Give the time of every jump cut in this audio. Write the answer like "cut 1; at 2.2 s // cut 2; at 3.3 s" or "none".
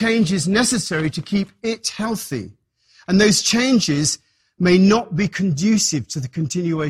none